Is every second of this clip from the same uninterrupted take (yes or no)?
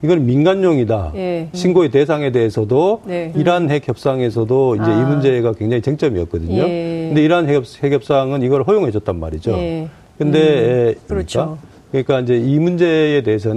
no